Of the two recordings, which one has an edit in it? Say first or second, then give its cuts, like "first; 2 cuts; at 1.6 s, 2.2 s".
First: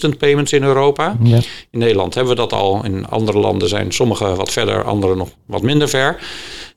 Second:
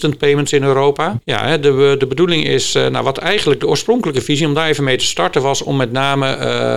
second; 1 cut; at 1.2 s